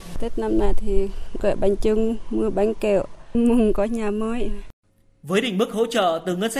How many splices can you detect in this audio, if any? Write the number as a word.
zero